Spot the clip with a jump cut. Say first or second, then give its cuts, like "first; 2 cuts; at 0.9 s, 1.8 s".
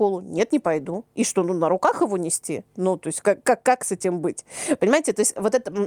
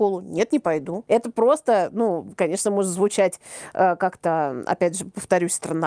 second; 1 cut; at 1.1 s